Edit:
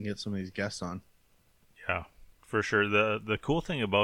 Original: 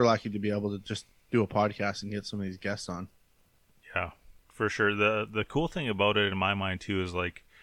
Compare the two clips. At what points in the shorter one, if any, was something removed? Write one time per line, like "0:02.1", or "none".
none